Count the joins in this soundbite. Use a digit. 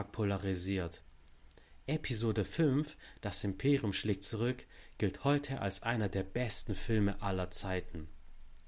0